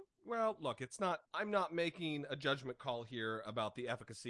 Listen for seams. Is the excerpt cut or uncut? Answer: cut